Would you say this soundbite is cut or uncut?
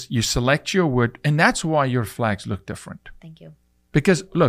uncut